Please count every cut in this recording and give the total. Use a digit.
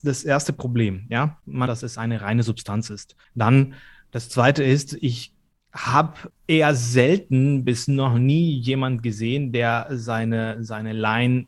1